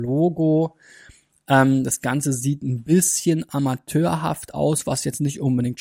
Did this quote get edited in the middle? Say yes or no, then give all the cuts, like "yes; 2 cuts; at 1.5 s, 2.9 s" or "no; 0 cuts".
no; 0 cuts